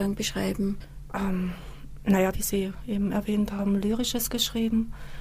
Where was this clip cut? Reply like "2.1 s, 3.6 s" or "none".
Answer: 2.3 s